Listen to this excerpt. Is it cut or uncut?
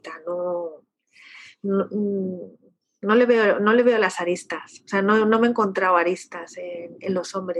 uncut